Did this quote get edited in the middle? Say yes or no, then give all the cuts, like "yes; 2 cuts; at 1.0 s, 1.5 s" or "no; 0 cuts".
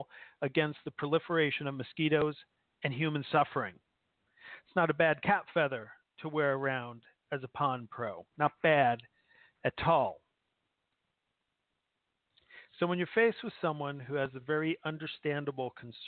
no; 0 cuts